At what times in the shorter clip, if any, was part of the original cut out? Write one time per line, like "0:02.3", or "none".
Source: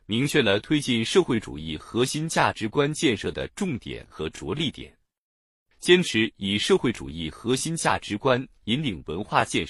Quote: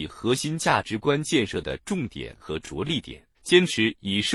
0:03.3